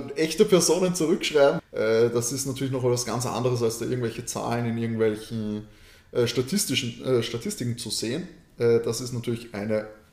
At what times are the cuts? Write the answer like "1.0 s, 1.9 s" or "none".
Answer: 1.6 s

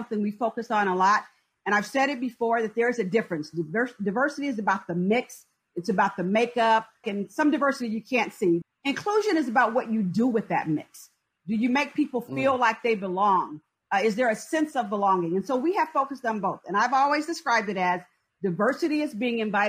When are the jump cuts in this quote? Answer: 7.0 s, 8.6 s

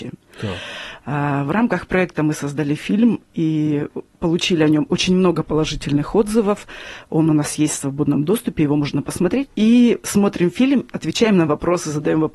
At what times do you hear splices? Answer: 9.5 s, 10.9 s

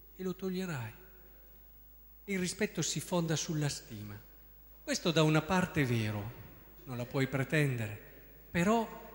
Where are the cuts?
4.7 s, 6.8 s

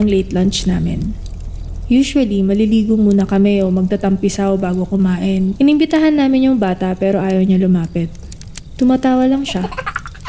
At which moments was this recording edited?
5.6 s

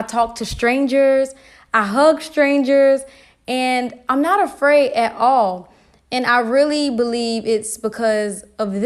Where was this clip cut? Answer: none

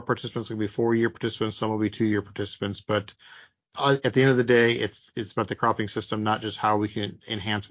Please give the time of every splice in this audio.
none

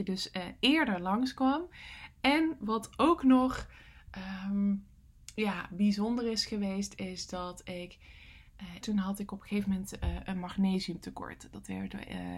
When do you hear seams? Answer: 2.6 s, 8.8 s

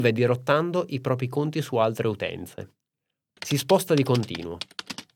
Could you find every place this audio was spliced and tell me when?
3.4 s

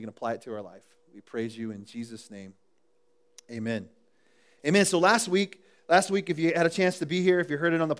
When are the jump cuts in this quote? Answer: none

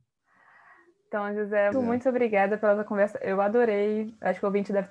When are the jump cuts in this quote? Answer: 1.7 s

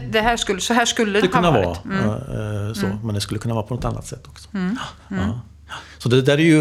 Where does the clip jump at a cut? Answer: 1.2 s

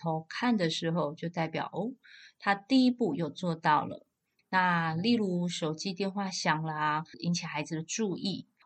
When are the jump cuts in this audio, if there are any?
4.4 s, 7.1 s

